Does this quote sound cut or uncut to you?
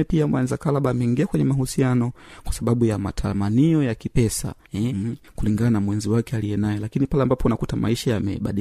cut